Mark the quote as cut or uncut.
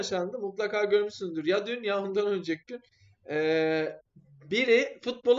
uncut